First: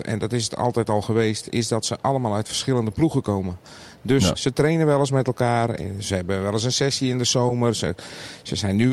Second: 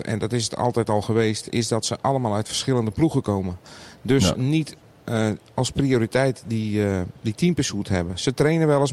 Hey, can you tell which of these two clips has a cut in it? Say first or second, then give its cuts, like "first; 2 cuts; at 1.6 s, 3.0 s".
first; 1 cut; at 4.3 s